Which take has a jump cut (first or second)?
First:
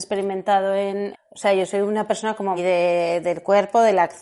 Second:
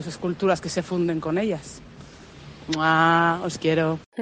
first